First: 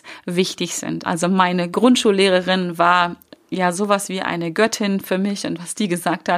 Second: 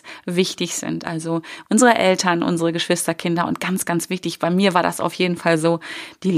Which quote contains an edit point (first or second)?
first